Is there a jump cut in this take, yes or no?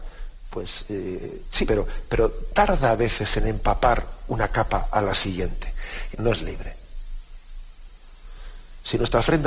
yes